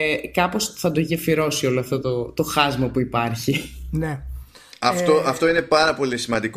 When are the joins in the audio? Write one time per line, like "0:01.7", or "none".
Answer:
none